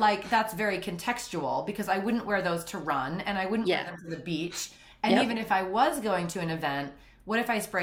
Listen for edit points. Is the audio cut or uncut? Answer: uncut